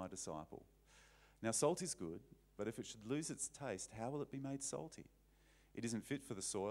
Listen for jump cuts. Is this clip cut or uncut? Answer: uncut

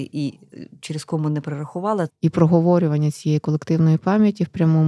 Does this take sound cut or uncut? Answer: cut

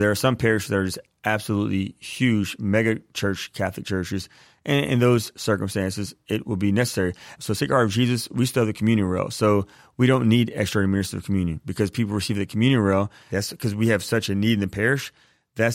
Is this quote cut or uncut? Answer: cut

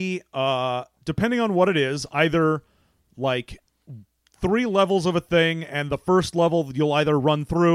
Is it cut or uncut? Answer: uncut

